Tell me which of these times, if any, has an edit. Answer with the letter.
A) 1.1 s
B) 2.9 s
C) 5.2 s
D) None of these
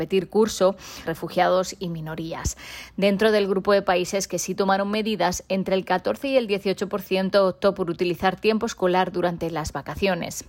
A